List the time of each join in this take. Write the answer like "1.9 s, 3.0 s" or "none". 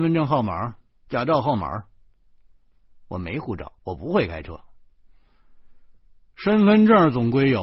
1.1 s, 3.8 s